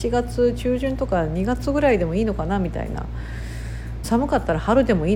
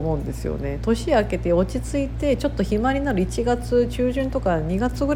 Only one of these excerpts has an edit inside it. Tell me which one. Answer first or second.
first